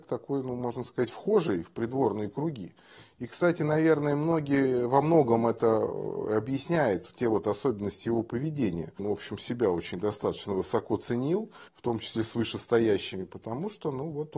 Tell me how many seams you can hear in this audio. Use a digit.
2